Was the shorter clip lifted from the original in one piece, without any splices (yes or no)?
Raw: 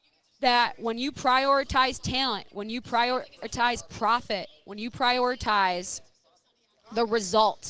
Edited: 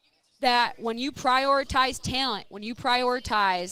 no